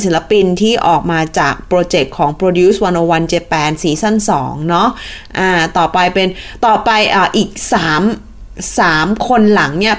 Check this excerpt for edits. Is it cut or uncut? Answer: uncut